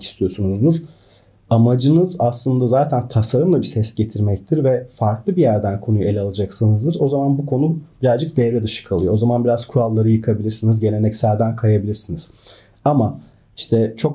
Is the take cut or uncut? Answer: uncut